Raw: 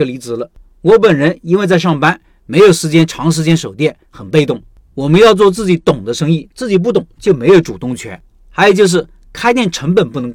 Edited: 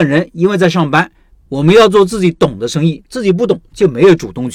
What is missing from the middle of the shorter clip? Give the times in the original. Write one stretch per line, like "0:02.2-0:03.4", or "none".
0:02.4-0:04.8